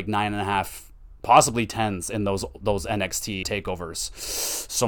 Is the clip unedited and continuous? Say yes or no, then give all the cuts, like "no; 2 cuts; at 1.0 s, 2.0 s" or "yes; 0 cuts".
no; 2 cuts; at 1.2 s, 3.4 s